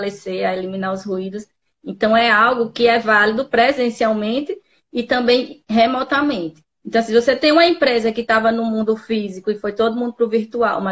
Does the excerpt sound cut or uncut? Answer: cut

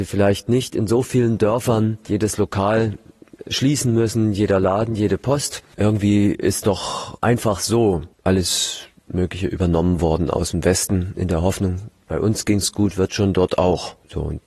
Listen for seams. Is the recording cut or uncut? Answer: uncut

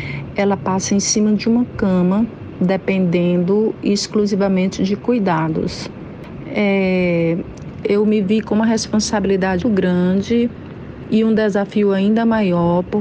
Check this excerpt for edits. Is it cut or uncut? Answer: cut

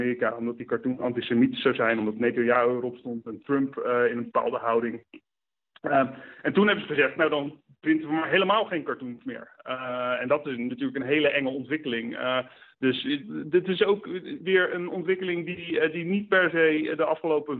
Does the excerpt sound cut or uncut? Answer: uncut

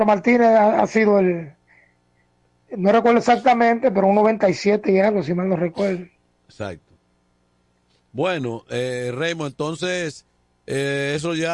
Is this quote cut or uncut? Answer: uncut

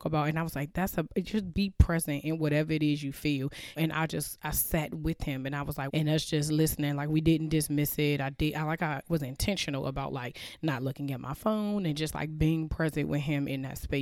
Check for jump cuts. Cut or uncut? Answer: cut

